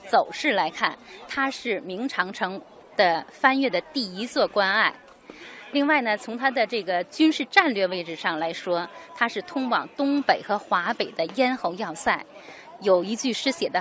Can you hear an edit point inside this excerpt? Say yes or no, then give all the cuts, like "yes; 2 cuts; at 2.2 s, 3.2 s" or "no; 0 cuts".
no; 0 cuts